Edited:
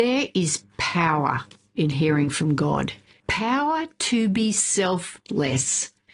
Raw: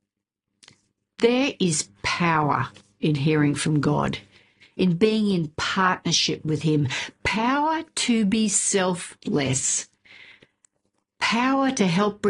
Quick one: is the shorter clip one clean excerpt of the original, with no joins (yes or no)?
no